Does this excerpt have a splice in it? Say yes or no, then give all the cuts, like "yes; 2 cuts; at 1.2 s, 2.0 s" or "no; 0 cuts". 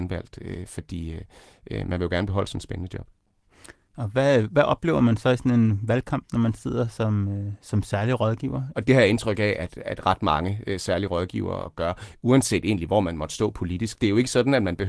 yes; 1 cut; at 8.7 s